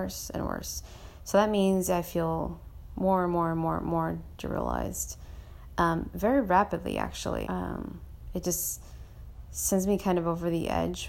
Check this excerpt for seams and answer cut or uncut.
cut